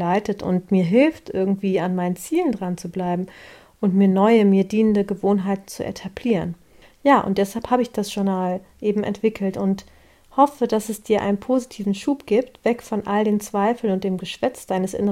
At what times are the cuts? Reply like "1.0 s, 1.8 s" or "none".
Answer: none